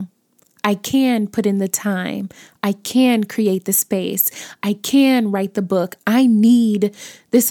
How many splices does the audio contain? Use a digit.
1